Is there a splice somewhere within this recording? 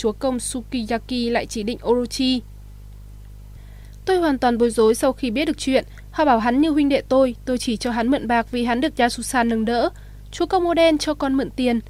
no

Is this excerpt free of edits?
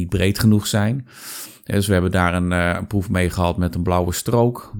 yes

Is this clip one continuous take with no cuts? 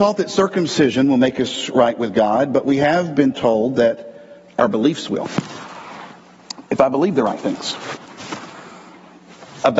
yes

